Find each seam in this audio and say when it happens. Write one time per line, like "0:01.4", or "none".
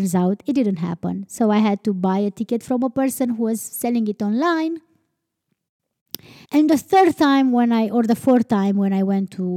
0:06.4

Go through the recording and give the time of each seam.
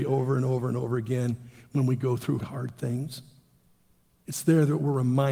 0:02.4

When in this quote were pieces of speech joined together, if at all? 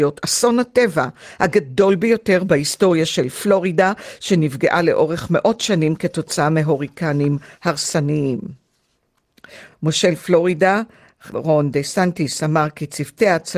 none

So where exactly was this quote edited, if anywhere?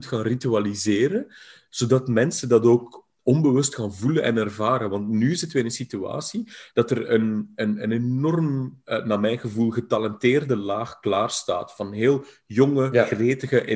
none

